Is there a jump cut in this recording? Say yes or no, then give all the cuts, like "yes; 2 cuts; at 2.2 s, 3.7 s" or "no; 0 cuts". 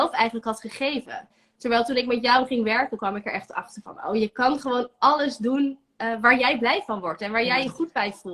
no; 0 cuts